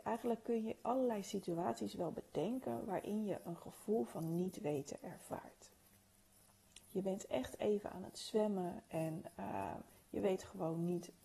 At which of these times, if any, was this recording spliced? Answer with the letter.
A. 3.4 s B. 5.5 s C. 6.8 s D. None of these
C